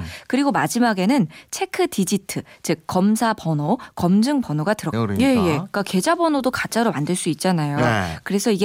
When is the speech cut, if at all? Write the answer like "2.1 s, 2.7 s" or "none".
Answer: 4.9 s